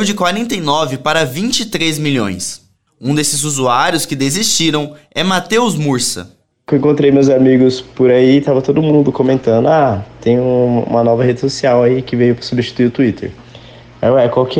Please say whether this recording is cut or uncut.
uncut